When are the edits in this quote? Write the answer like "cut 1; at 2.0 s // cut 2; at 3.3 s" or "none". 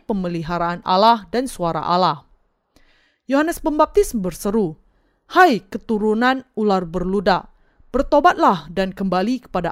none